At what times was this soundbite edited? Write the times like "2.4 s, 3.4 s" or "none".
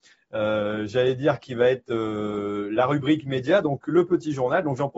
none